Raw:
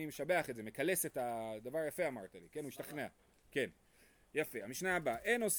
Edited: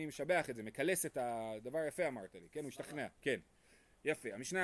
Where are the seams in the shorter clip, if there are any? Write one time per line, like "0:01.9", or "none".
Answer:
0:03.2